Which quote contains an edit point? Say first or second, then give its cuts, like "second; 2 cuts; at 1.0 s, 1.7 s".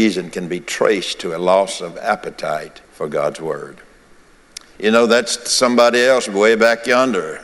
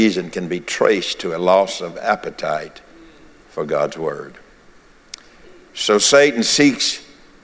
first; 2 cuts; at 2.8 s, 4.7 s